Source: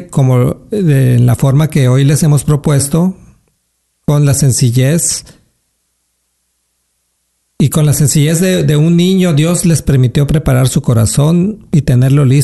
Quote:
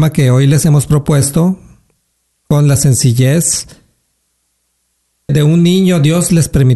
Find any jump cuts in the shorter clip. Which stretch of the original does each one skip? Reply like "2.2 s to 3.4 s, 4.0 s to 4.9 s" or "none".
6.9 s to 8.6 s